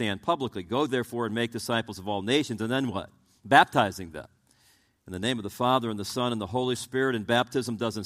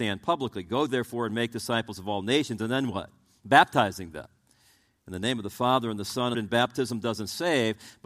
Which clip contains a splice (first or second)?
second